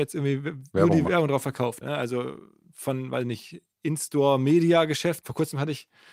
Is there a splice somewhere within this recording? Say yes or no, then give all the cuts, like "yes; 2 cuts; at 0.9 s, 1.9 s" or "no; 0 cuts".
yes; 2 cuts; at 1.8 s, 5.2 s